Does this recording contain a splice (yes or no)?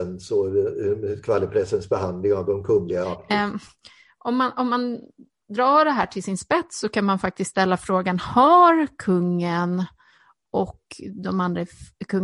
yes